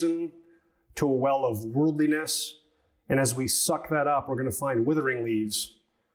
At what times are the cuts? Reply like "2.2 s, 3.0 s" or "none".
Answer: none

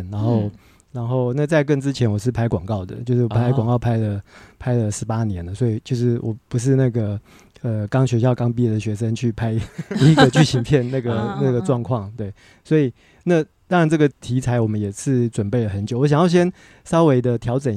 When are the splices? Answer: 14.1 s

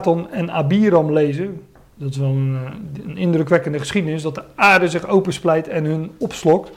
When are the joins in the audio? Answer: none

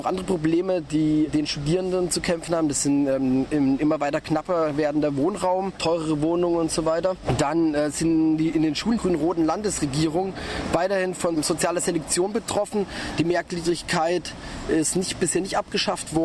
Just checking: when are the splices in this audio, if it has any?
9.0 s

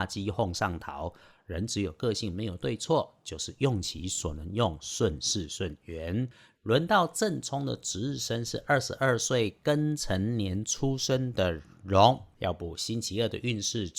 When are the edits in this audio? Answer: 6.6 s, 12.3 s

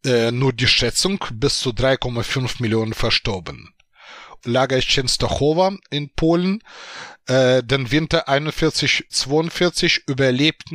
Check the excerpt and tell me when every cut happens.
4.4 s, 9.1 s

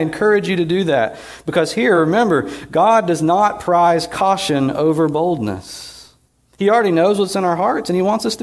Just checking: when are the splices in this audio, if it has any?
none

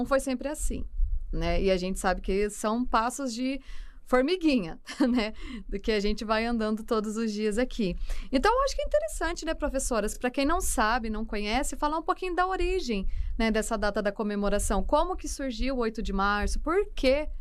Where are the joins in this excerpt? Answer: none

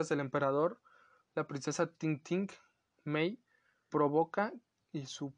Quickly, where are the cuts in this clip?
3.9 s

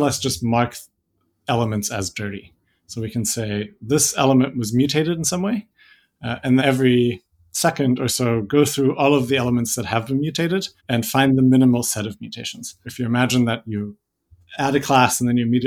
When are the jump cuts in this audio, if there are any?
6.6 s, 10.8 s, 12.8 s

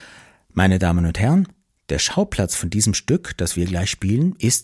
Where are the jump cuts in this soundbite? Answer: none

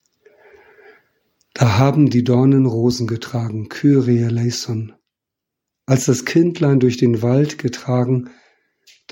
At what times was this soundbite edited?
none

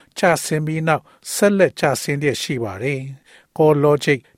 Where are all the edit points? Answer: none

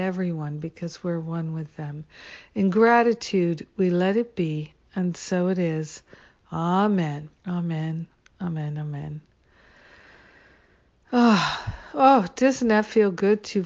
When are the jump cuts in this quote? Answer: 7.4 s

